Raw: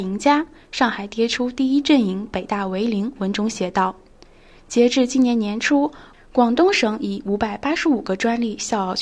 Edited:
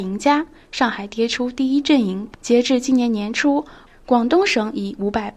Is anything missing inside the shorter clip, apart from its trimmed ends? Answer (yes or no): yes